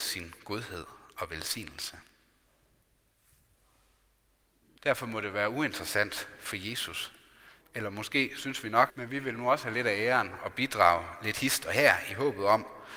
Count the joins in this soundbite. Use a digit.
3